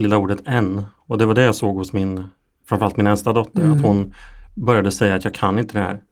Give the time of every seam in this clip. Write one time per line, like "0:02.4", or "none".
none